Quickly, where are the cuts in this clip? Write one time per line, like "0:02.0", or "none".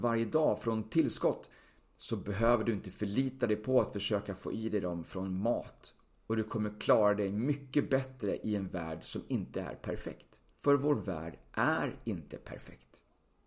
0:10.5